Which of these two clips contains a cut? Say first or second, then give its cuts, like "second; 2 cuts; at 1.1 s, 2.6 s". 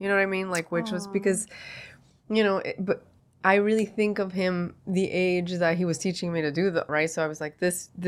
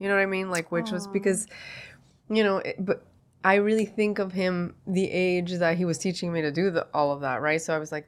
first; 1 cut; at 6.9 s